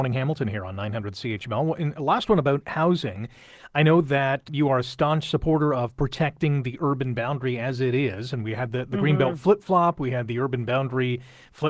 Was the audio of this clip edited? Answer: yes; 1 cut; at 4.5 s

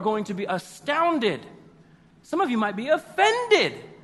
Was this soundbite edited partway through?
no; 0 cuts

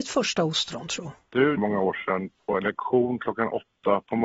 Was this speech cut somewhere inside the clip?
yes; 1 cut; at 1.6 s

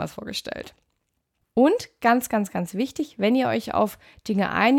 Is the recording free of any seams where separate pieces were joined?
no; 1 cut; at 1.4 s

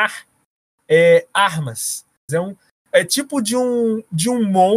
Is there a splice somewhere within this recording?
yes; 1 cut; at 2.3 s

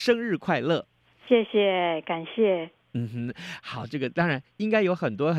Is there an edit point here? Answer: no; 0 cuts

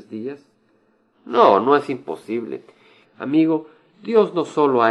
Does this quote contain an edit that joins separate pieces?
yes; 1 cut; at 3.0 s

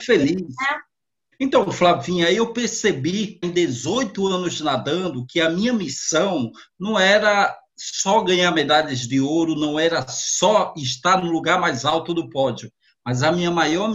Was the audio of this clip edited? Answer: yes; 2 cuts; at 1.3 s, 3.4 s

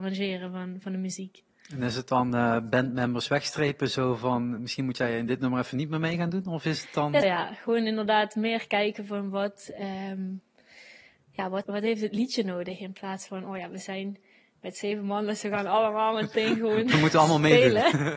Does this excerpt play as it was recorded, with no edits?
no; 2 cuts; at 7.2 s, 11.6 s

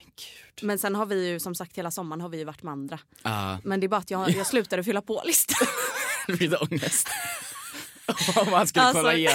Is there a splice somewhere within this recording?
no; 0 cuts

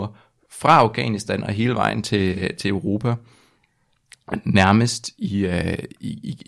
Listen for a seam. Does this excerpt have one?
no; 0 cuts

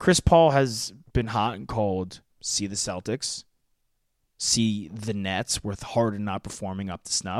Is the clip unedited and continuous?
no; 1 cut; at 2.3 s

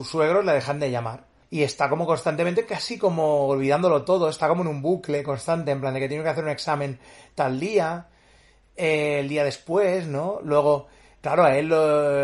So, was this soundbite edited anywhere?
yes; 1 cut; at 1.4 s

